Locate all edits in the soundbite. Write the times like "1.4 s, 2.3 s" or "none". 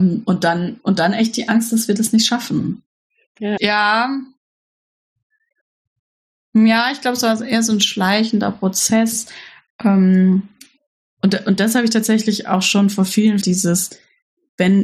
3.6 s, 13.4 s